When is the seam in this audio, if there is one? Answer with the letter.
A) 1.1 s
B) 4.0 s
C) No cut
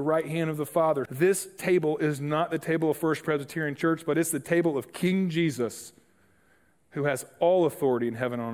A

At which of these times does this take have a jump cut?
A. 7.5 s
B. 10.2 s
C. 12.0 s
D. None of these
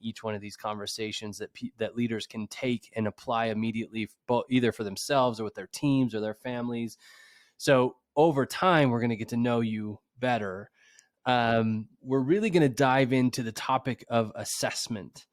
C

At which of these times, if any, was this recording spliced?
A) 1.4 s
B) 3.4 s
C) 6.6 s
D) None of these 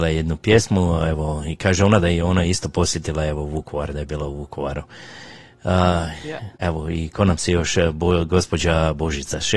C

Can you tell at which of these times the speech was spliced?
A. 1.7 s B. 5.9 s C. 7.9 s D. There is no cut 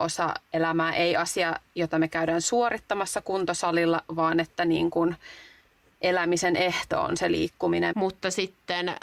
C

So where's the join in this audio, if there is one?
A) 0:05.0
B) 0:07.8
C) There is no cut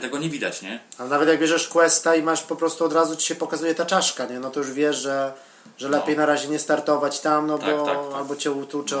C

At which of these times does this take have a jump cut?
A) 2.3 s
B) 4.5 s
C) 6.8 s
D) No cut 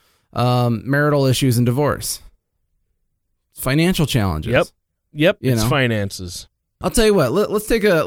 C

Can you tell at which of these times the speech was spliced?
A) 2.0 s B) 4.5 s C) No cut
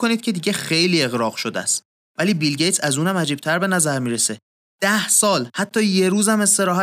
A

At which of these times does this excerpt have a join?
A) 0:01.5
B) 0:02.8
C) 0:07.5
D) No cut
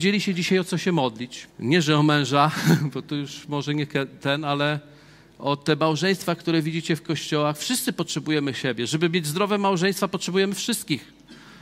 A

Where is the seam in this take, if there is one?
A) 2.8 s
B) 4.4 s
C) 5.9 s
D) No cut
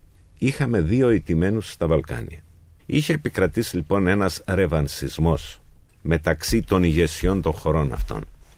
A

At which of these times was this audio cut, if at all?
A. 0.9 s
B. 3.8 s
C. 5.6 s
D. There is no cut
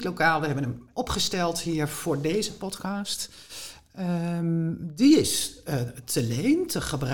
A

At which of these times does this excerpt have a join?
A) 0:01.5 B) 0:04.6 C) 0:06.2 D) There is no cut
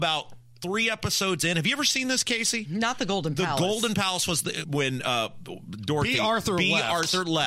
B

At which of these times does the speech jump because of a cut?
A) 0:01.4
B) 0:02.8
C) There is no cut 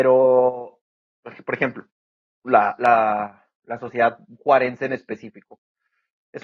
C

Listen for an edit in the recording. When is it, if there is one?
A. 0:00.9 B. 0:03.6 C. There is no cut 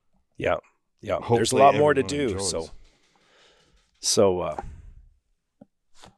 C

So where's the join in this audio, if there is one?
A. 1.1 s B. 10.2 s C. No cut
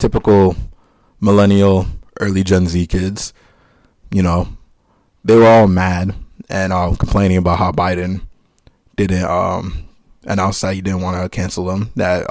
C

